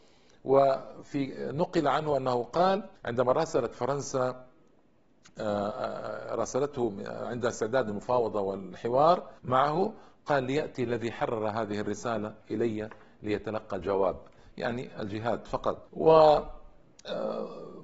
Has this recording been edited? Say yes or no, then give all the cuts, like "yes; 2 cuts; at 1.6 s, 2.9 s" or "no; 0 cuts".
yes; 3 cuts; at 3.0 s, 9.4 s, 15.9 s